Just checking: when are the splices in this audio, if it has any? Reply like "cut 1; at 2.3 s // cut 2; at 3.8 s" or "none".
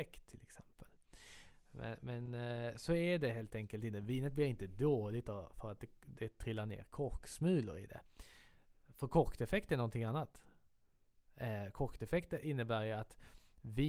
none